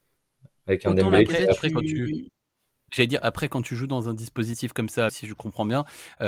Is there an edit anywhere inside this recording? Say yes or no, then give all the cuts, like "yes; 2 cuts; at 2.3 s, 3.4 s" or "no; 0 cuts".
yes; 2 cuts; at 2.9 s, 5.1 s